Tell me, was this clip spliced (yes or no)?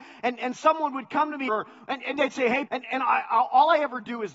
yes